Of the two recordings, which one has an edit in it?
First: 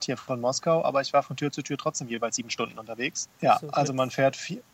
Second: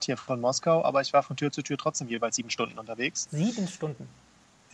first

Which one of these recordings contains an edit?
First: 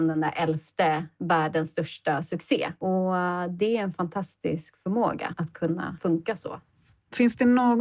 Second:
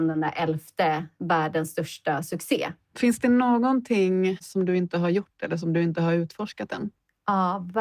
second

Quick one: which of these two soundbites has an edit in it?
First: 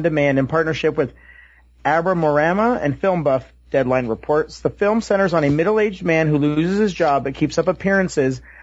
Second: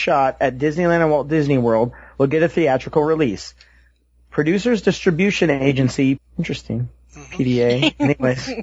second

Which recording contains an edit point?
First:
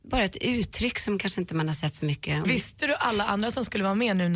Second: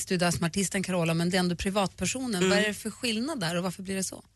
first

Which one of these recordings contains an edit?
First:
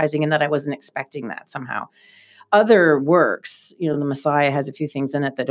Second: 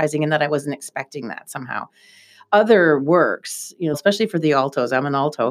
second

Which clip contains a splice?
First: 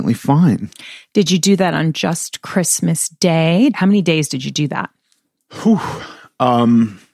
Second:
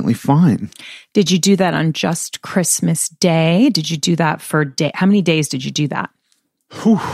first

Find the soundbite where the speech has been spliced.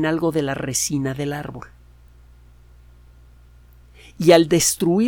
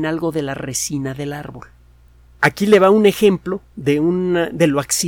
second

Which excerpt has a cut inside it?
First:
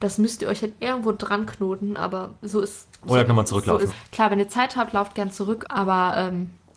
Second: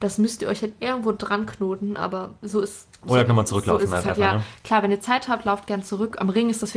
first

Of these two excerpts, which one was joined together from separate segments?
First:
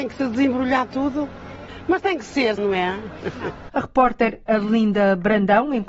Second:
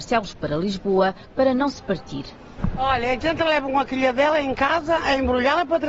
first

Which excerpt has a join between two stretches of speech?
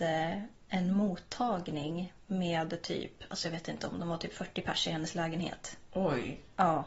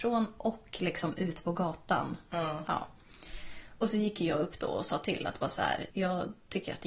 second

